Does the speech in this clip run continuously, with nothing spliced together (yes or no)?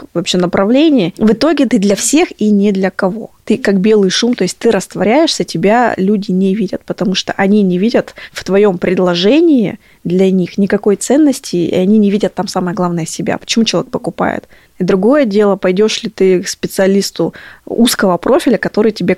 no